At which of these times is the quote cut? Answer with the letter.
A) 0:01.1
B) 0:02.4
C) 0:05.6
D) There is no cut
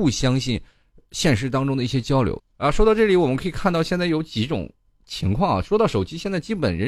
B